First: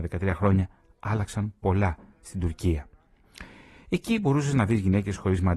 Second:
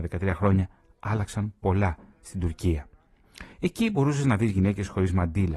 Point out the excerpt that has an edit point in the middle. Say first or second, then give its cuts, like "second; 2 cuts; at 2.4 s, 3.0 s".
second; 1 cut; at 3.5 s